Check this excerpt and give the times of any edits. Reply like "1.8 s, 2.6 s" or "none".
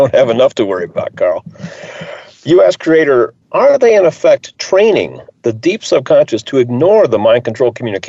3.4 s